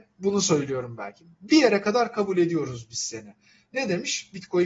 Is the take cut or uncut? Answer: uncut